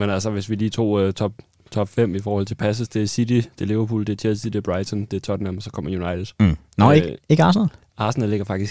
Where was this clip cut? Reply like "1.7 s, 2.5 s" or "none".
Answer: none